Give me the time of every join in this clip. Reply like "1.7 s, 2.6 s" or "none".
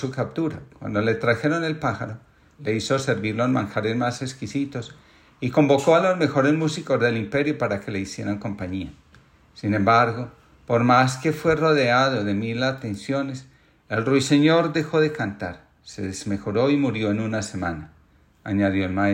2.5 s